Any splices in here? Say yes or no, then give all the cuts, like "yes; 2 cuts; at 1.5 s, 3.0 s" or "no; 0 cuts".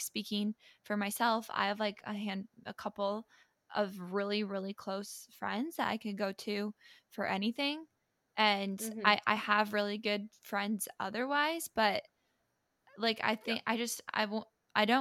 no; 0 cuts